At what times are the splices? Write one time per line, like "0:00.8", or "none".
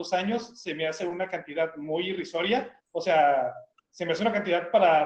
none